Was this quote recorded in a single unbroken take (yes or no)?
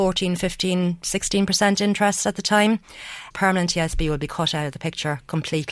no